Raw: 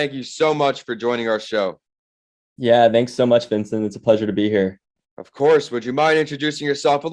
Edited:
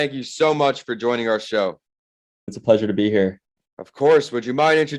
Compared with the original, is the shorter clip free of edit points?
no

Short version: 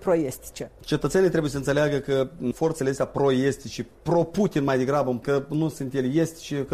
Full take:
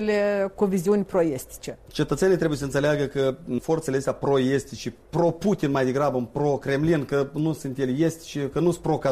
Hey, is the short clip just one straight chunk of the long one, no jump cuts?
no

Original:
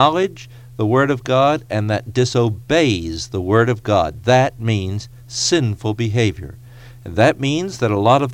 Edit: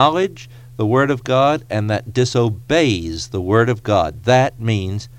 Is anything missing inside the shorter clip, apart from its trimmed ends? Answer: no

